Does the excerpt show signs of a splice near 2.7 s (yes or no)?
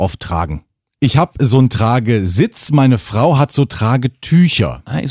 no